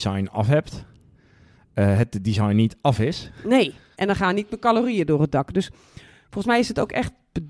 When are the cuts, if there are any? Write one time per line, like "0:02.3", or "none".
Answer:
0:03.9

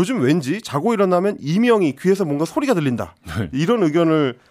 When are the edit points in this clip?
none

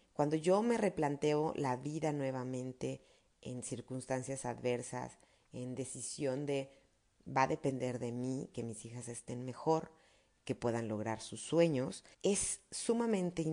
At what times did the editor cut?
0:10.4
0:12.1

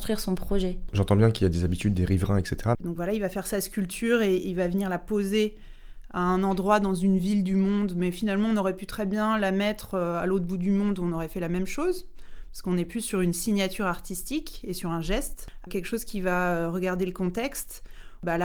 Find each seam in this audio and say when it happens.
0:02.7
0:15.7

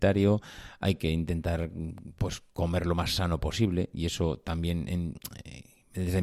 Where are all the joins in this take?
none

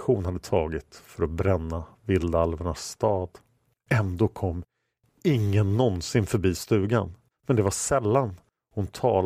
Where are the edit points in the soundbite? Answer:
0:07.3

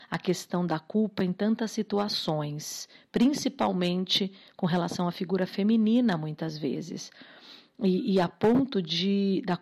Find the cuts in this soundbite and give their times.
none

